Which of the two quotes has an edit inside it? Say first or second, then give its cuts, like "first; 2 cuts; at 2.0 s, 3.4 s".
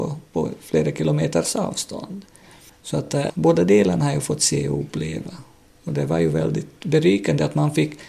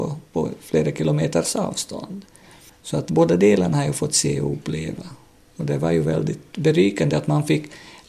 second; 1 cut; at 3.1 s